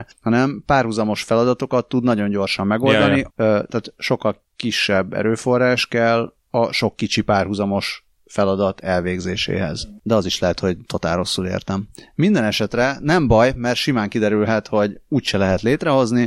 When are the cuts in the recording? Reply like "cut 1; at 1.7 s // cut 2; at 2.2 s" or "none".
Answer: cut 1; at 3.3 s